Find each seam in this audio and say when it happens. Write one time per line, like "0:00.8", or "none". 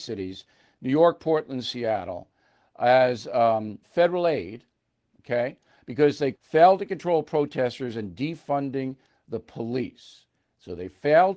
0:03.8
0:06.3